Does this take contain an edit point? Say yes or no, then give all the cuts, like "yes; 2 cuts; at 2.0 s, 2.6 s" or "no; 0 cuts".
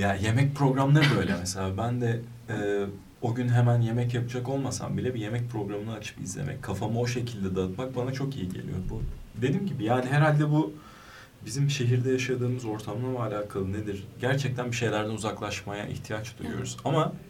yes; 1 cut; at 3.1 s